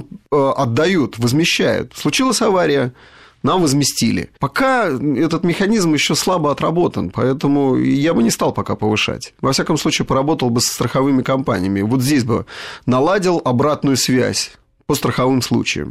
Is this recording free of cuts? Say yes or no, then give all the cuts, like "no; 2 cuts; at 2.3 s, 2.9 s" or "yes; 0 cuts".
yes; 0 cuts